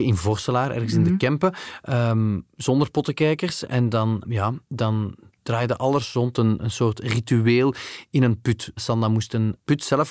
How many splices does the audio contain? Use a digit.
1